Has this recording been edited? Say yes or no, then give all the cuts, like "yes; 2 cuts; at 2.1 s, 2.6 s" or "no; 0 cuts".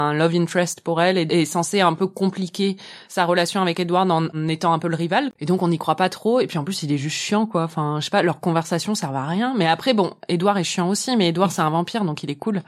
no; 0 cuts